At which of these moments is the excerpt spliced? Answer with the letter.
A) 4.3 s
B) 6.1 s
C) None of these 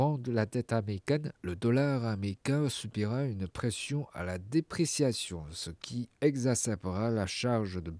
B